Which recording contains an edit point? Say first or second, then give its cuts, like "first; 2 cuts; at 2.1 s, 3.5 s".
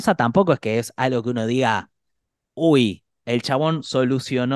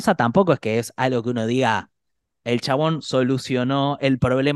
second; 1 cut; at 2.3 s